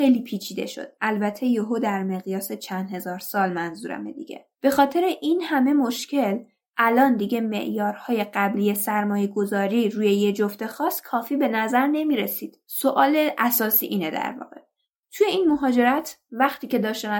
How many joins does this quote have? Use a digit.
1